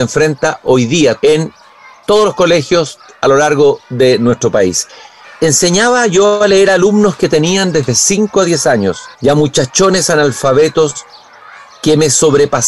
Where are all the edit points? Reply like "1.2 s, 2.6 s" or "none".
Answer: 1.2 s, 5.2 s, 9.1 s